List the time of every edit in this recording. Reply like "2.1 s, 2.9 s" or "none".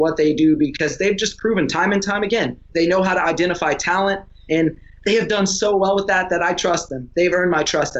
2.7 s, 4.5 s